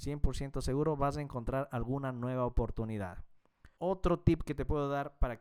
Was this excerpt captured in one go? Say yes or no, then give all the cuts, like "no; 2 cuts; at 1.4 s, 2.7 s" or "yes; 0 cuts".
no; 1 cut; at 3.7 s